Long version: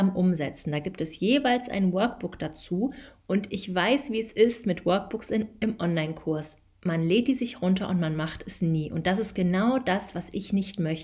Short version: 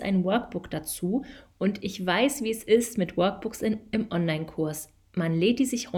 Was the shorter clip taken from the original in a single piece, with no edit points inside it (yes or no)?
yes